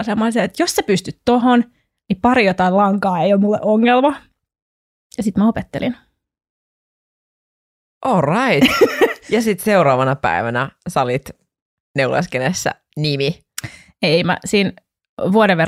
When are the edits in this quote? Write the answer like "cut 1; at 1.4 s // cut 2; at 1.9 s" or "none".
none